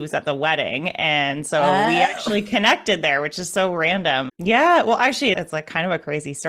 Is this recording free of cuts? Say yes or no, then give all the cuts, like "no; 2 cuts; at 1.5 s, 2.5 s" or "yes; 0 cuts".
no; 2 cuts; at 4.3 s, 5.3 s